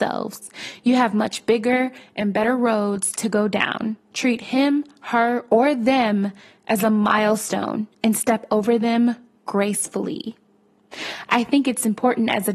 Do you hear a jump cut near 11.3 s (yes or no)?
no